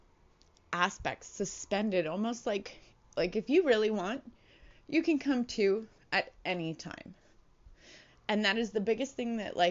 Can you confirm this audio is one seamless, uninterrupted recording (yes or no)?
no